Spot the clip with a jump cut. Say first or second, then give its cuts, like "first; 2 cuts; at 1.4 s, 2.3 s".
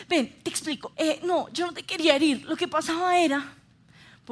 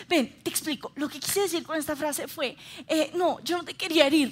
first; 1 cut; at 0.9 s